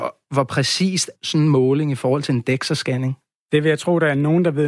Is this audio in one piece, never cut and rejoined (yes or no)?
no